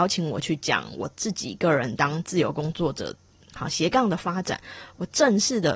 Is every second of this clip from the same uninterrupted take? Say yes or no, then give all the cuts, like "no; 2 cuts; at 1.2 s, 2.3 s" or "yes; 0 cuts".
yes; 0 cuts